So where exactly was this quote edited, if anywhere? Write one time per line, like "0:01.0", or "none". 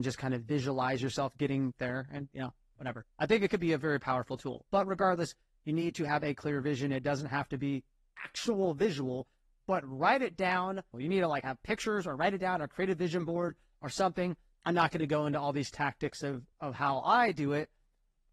0:10.9
0:14.5
0:16.5